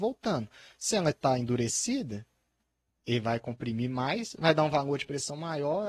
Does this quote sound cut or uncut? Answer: uncut